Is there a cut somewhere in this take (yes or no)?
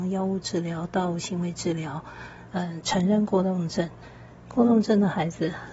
yes